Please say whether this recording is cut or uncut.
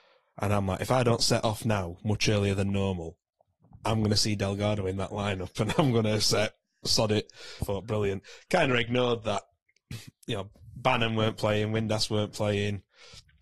cut